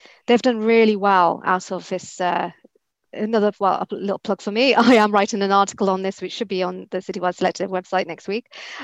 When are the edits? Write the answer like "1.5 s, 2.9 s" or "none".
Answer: none

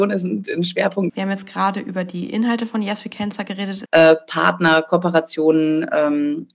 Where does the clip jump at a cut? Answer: 1.1 s, 3.9 s

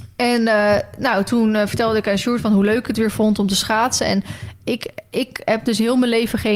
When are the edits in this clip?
none

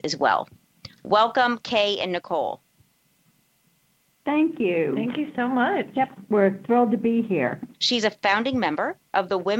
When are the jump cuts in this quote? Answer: 7.7 s

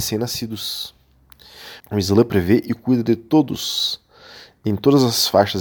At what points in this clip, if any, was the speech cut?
1.8 s

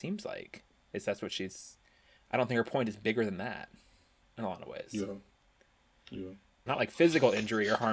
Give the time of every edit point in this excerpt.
6.7 s

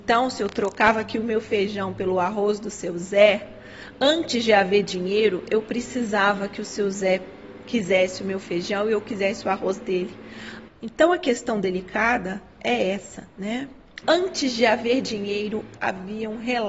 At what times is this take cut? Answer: 10.7 s, 14.0 s, 15.8 s

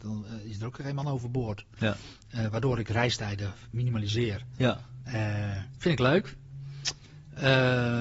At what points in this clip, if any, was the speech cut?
1.8 s

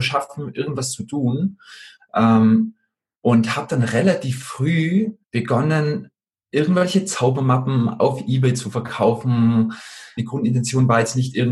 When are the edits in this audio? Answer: 5.2 s, 10.2 s

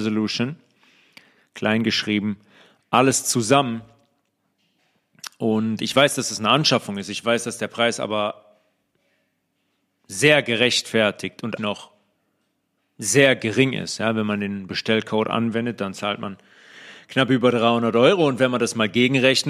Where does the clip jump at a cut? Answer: 11.6 s

